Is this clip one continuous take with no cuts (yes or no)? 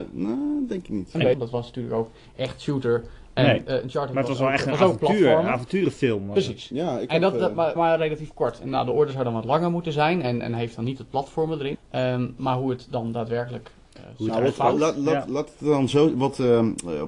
no